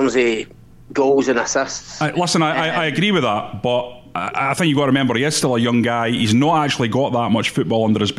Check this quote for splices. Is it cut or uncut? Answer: uncut